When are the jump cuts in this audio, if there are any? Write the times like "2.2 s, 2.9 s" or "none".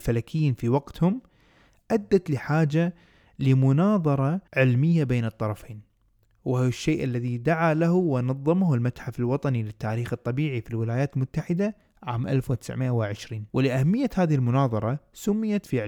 4.5 s, 13.5 s